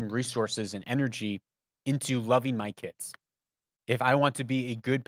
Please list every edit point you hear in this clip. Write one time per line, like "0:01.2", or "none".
0:03.8